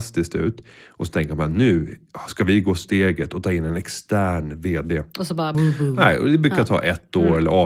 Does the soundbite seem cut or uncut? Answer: cut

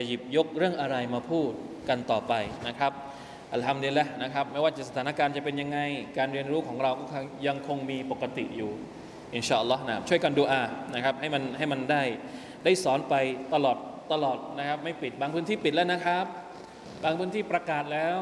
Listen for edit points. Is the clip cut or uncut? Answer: uncut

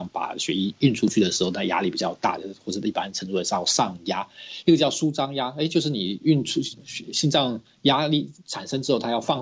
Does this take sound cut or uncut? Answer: uncut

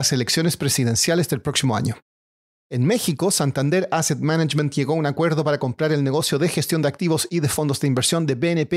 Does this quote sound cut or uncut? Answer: cut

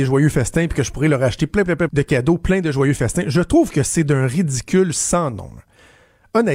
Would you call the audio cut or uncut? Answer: cut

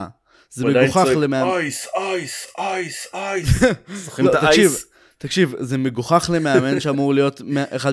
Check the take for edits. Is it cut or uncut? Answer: uncut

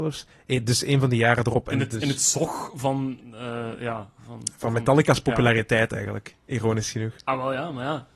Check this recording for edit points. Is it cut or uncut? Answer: uncut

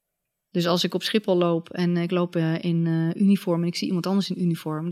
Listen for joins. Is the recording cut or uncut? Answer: uncut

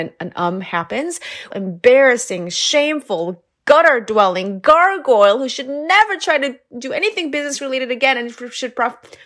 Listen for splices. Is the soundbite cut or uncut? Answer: cut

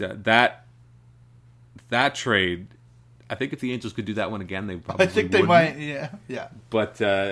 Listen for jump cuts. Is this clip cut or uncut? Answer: uncut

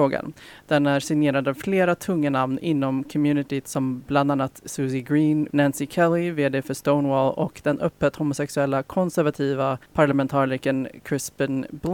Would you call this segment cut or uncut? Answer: cut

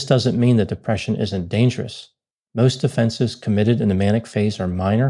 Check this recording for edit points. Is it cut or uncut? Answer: uncut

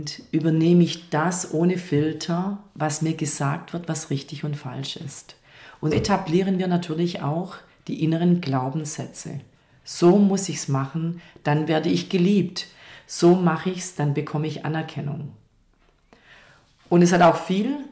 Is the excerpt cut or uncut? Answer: cut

